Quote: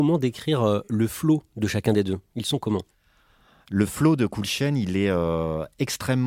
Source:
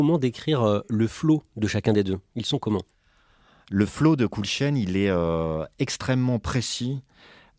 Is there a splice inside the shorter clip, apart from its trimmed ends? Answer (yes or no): no